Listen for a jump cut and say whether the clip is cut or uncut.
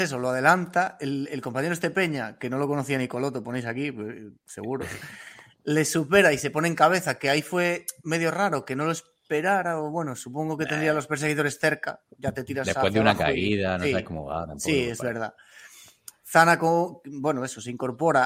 uncut